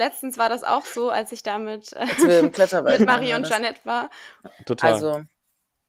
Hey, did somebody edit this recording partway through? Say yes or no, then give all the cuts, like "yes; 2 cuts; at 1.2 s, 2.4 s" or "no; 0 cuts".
yes; 1 cut; at 4.4 s